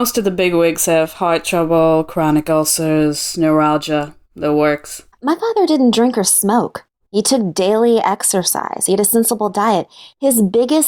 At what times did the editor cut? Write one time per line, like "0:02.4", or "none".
0:05.1